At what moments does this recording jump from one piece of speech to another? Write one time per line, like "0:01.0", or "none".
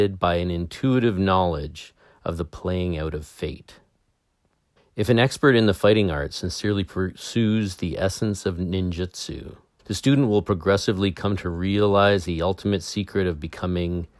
0:04.8
0:09.8